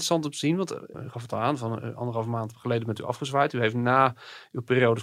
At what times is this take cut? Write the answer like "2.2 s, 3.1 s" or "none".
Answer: none

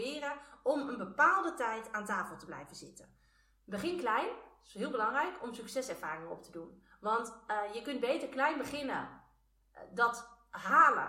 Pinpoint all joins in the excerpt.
none

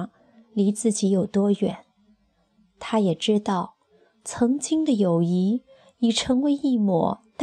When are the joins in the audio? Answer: none

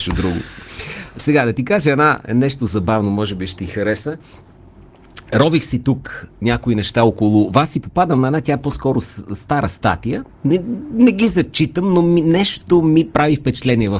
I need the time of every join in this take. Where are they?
none

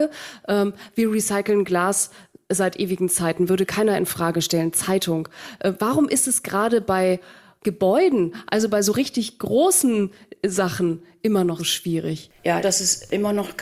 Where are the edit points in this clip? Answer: 11.6 s, 12.6 s

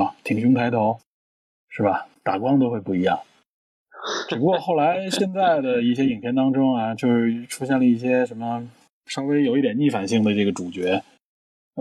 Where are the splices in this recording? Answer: none

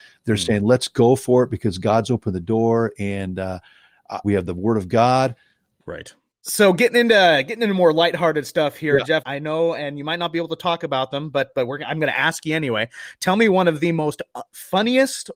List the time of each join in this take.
4.2 s, 5.8 s, 9.2 s

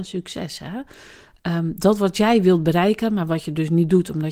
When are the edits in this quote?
none

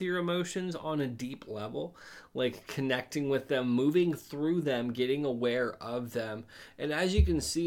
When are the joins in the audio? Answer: none

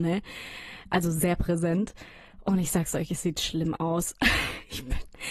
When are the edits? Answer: none

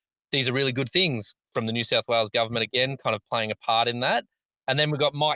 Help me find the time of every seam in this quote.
none

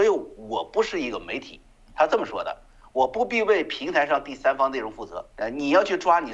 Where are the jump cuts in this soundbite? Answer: 5.3 s

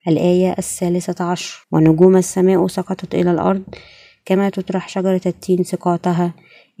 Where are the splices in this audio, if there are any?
1.6 s

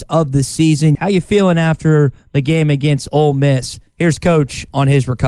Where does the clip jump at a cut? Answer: 0.9 s

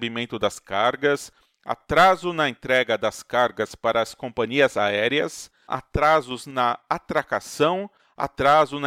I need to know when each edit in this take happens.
5.7 s

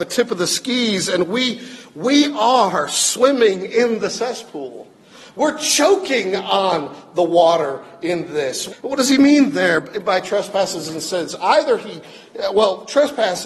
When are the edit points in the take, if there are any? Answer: 8.7 s

